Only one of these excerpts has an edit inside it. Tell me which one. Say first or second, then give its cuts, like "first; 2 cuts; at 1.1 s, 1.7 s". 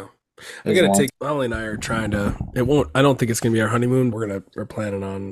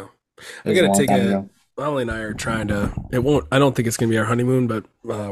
first; 2 cuts; at 1.1 s, 4.1 s